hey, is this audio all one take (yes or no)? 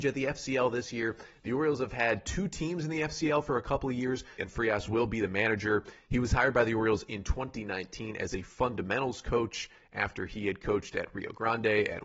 no